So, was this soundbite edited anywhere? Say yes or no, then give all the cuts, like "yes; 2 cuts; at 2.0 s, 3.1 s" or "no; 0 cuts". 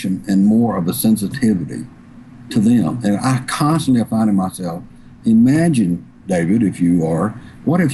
no; 0 cuts